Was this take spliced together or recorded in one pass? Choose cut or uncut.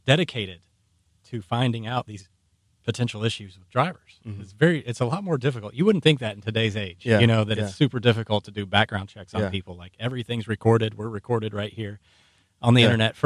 uncut